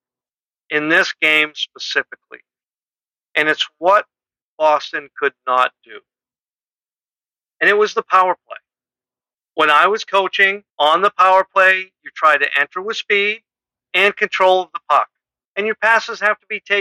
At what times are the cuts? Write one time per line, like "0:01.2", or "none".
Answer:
0:09.4
0:10.7
0:15.4

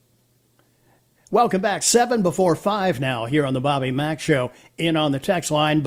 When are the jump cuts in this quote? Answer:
none

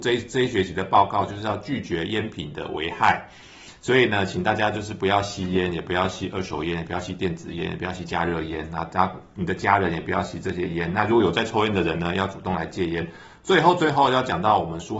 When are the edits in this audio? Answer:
none

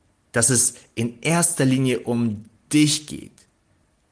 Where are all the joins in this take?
none

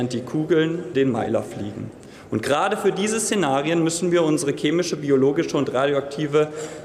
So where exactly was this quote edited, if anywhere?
0:00.9

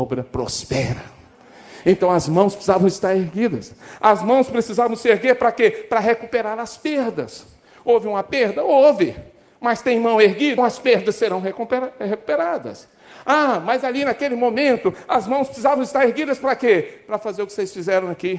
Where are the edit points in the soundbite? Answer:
0:10.6

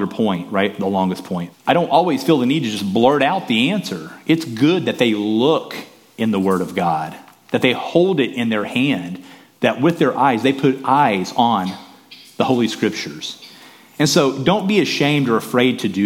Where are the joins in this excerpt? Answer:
0:01.5

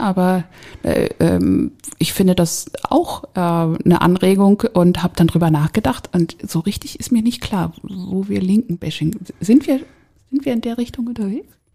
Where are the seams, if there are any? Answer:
none

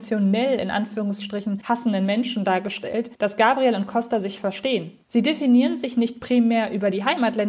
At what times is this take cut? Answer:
none

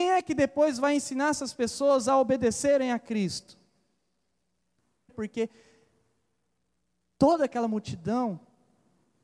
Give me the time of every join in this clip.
0:05.1

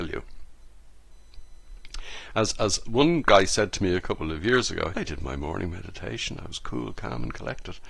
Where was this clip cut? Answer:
0:04.9

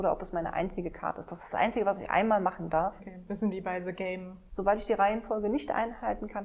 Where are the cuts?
0:03.0
0:04.5

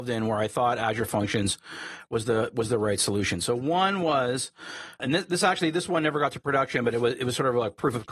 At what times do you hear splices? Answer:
0:05.0

